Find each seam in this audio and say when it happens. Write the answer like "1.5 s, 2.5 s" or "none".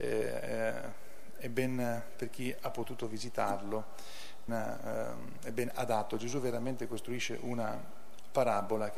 4.5 s